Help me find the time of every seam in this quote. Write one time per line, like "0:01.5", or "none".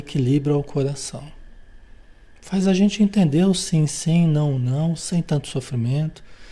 none